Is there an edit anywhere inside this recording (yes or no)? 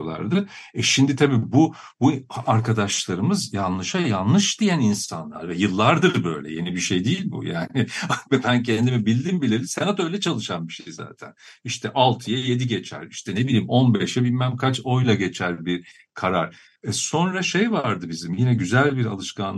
yes